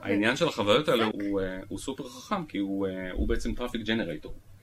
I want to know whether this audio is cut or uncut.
cut